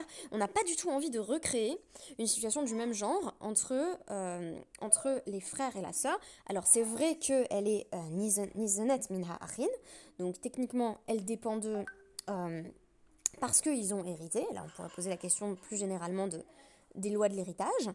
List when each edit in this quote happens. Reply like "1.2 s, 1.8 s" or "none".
none